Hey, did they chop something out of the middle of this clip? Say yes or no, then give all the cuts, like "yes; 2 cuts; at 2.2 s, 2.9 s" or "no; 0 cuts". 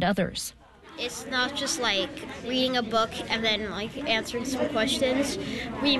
no; 0 cuts